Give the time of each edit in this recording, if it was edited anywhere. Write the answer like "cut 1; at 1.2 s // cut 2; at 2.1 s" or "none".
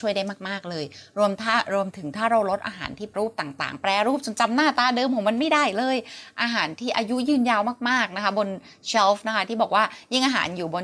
cut 1; at 3.1 s